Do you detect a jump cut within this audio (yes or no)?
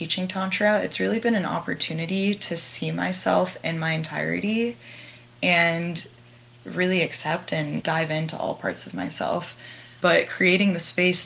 yes